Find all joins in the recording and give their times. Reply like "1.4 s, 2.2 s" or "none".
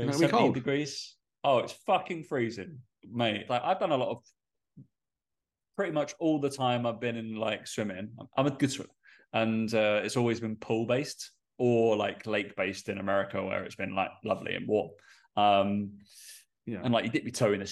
3.5 s